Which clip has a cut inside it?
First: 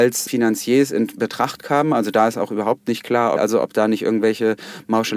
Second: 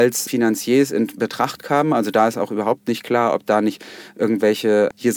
first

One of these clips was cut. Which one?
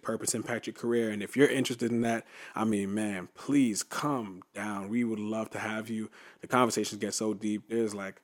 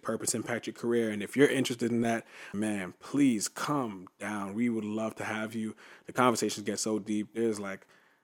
second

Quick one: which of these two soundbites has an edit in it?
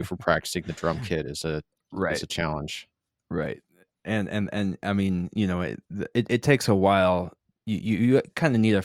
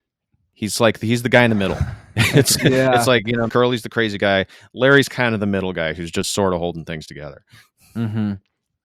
second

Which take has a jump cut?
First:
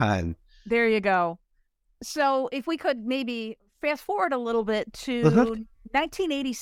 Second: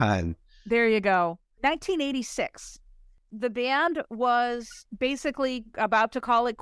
second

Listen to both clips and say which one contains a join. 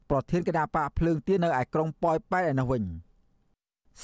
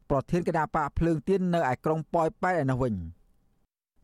first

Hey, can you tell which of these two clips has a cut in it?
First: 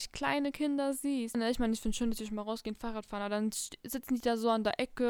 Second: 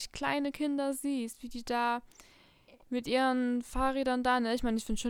first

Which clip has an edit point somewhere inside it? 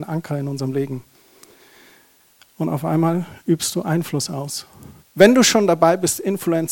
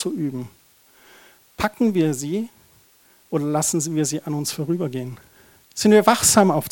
first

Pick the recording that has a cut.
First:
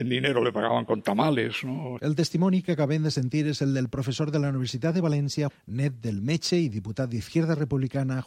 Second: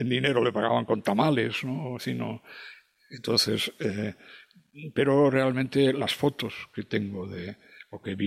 first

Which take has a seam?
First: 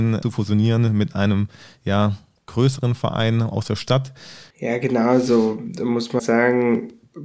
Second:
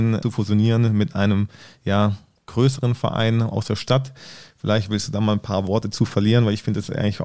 first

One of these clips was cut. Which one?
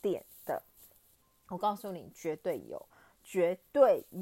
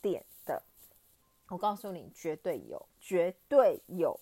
second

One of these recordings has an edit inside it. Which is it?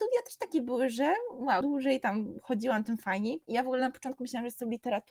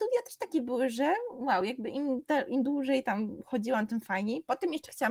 first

